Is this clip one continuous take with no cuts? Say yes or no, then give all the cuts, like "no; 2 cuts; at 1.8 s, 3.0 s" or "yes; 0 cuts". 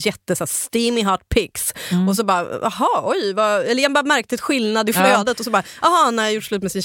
yes; 0 cuts